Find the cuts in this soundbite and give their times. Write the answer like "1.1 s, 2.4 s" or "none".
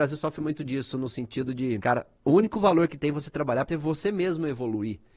1.8 s, 3.7 s